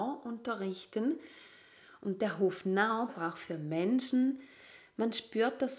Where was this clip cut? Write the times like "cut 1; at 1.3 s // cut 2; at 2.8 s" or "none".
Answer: cut 1; at 3.1 s